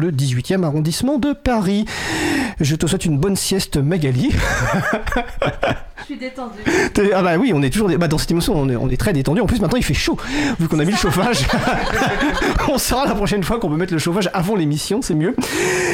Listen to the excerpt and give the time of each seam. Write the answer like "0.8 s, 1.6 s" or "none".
none